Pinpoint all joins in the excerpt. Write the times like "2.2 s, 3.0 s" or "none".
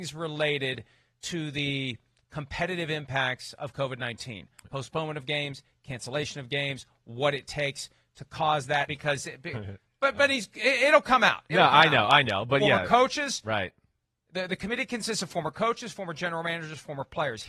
8.9 s